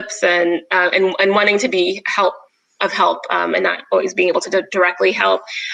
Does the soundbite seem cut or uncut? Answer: uncut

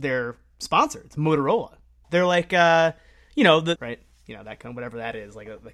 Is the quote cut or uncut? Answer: cut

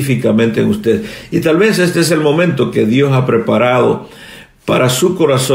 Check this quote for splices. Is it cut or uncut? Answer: uncut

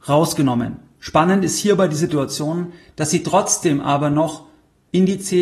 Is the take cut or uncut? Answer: cut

